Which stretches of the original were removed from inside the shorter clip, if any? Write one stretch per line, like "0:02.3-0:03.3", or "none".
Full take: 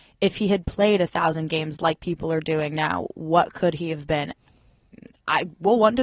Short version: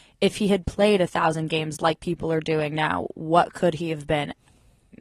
none